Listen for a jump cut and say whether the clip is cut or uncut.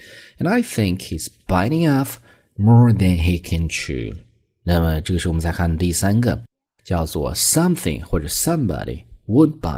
uncut